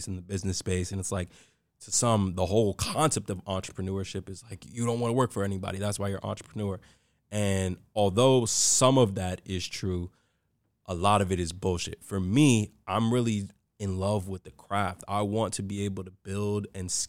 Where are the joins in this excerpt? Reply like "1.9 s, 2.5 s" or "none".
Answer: none